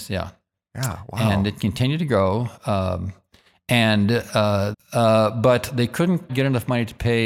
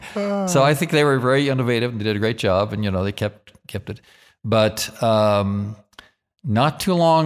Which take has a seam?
first; 2 cuts; at 4.7 s, 6.3 s

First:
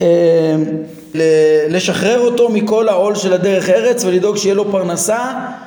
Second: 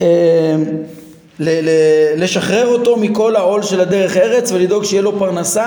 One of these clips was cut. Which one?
first; 1 cut; at 1.1 s

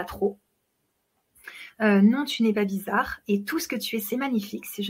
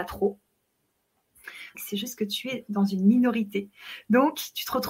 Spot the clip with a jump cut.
second; 1 cut; at 1.7 s

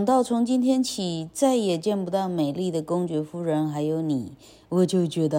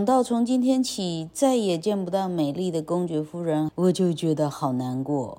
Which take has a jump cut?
second; 1 cut; at 3.7 s

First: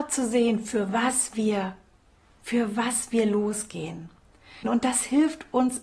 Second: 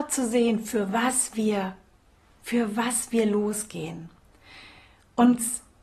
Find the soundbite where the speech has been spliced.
first; 1 cut; at 4.6 s

